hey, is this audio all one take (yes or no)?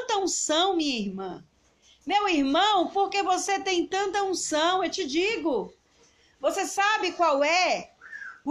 yes